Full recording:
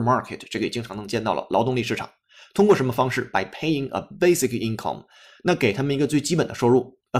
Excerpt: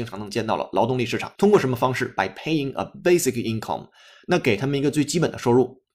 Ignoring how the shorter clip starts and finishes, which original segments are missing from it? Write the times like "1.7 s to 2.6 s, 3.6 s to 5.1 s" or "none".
2.1 s to 2.5 s